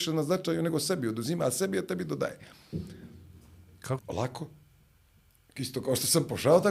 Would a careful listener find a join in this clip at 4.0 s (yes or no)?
yes